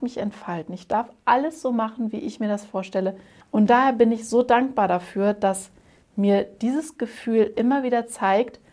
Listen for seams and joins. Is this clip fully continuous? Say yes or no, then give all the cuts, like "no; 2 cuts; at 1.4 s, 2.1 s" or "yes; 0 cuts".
no; 1 cut; at 3.4 s